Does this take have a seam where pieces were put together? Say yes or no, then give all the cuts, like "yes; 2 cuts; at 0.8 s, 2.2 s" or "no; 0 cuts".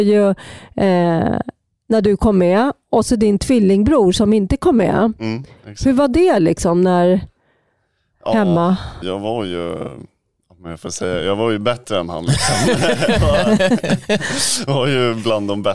yes; 1 cut; at 9.0 s